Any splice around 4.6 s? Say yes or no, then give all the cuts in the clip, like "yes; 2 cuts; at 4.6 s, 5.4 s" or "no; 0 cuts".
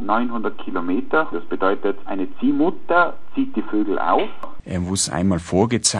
yes; 2 cuts; at 1.3 s, 4.6 s